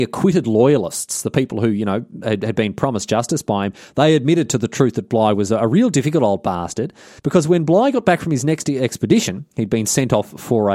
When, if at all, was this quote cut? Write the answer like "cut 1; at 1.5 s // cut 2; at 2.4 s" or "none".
cut 1; at 7.2 s